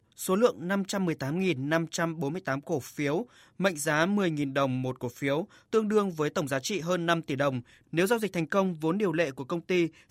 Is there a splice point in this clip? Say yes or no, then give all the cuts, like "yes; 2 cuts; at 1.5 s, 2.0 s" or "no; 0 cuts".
no; 0 cuts